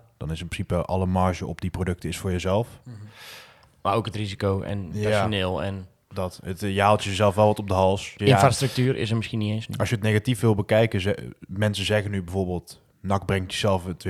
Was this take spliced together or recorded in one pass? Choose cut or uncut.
cut